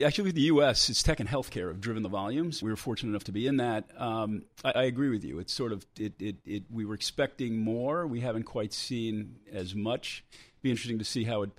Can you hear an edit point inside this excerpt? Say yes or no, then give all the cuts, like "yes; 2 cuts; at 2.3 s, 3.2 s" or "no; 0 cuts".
yes; 2 cuts; at 2.6 s, 4.7 s